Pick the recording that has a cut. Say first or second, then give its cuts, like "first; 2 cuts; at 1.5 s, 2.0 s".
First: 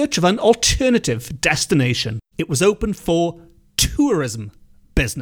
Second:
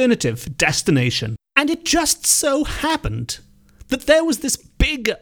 first; 1 cut; at 2.3 s